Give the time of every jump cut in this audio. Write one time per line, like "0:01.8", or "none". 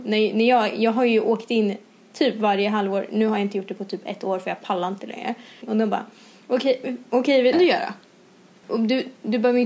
0:05.6
0:07.5
0:08.6